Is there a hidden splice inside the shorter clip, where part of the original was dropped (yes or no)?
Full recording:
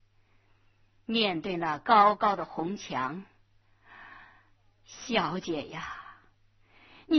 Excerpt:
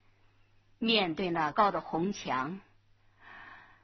yes